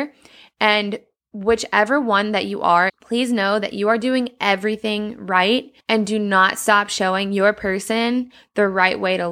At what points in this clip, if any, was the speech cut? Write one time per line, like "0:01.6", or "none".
0:02.9
0:05.8